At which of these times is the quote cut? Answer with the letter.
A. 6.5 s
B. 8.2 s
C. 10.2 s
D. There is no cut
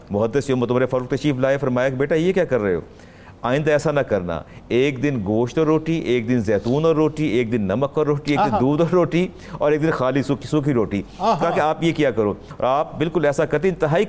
D